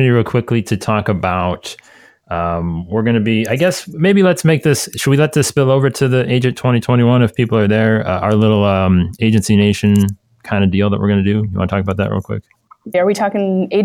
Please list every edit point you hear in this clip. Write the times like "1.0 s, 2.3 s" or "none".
12.9 s